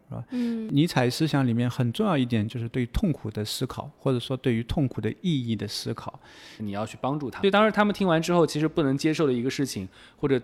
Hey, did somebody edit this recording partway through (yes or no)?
yes